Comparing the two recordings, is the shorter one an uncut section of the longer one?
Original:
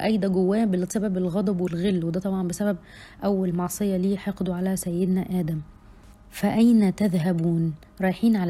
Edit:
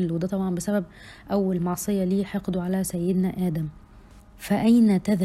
yes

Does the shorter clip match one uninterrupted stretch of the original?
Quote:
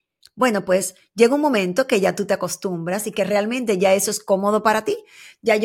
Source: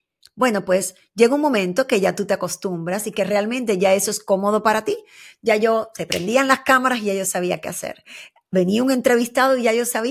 yes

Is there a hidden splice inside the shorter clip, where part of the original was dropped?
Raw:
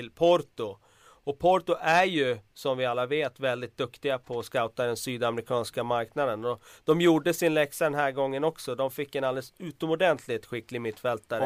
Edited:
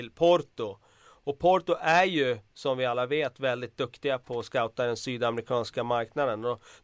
no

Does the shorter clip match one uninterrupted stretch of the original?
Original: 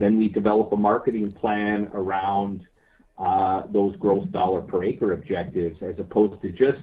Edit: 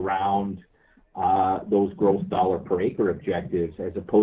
yes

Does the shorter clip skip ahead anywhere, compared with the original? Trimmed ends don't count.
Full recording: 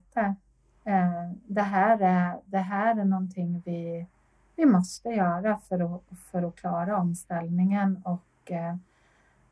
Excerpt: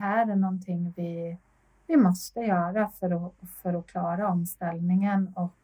no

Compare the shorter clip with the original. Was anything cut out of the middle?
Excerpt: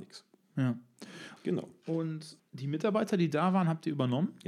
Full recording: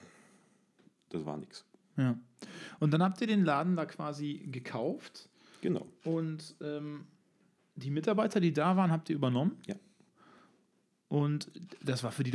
yes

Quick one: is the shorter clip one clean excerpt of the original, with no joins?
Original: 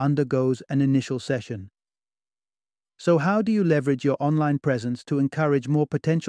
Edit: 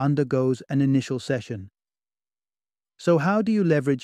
yes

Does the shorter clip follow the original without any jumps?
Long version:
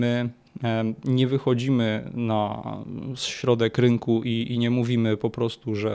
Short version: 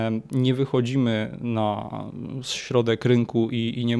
yes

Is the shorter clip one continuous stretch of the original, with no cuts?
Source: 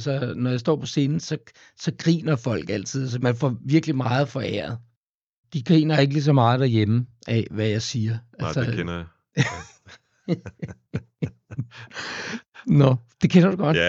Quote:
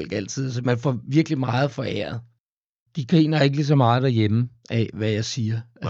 yes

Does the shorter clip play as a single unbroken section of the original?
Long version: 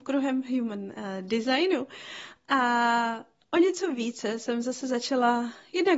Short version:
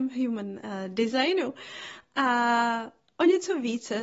yes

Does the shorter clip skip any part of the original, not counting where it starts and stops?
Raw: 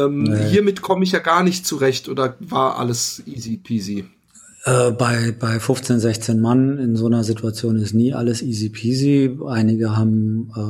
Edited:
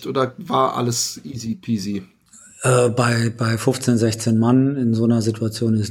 no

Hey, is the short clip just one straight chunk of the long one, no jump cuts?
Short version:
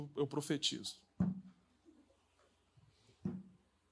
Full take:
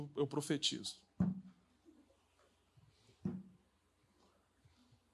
yes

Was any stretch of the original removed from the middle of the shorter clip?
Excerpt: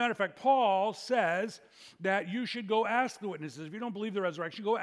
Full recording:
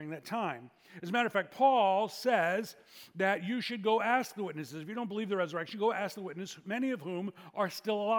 no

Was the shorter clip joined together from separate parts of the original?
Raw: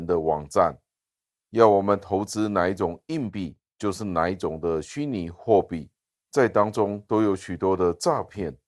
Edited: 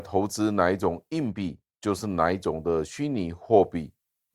no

